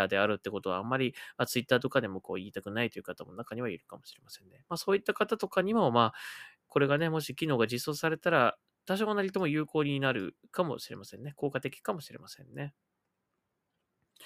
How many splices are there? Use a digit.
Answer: 0